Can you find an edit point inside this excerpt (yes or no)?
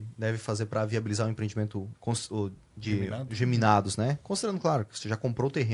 yes